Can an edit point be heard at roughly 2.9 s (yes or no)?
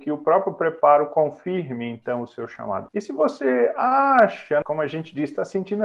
yes